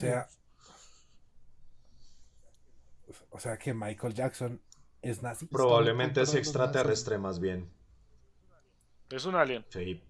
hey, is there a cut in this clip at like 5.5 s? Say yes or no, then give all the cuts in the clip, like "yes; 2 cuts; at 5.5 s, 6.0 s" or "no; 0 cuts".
yes; 1 cut; at 5.5 s